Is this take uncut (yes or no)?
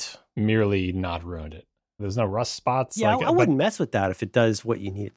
no